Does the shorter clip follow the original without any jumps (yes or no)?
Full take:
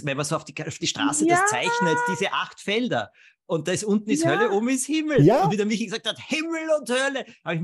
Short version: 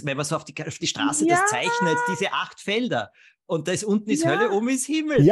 yes